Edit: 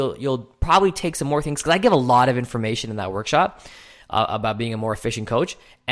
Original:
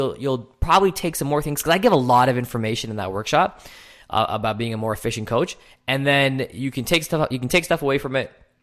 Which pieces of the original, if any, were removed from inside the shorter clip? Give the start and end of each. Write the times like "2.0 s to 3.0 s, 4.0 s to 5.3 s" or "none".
none